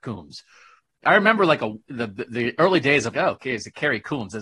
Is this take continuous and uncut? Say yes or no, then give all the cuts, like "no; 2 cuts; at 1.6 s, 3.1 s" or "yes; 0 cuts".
no; 1 cut; at 3.1 s